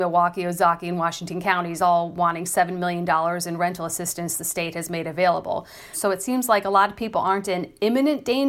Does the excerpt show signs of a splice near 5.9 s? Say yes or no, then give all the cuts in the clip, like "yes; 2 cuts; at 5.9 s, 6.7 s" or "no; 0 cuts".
yes; 1 cut; at 5.9 s